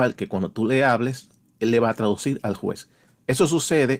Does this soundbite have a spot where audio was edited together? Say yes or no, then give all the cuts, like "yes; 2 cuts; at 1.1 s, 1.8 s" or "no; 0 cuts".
no; 0 cuts